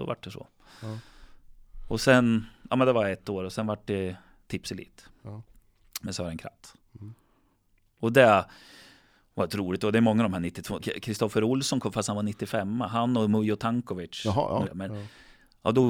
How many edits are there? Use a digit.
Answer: 2